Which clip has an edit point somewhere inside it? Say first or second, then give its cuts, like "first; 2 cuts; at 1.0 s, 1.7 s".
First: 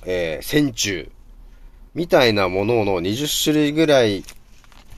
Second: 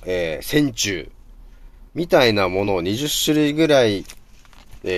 second; 1 cut; at 2.7 s